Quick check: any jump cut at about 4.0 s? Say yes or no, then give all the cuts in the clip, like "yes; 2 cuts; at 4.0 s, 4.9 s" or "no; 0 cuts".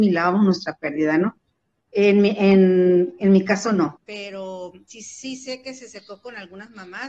yes; 2 cuts; at 1.9 s, 4.0 s